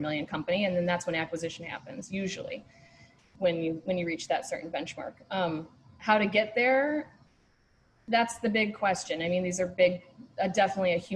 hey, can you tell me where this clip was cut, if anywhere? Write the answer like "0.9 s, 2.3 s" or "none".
none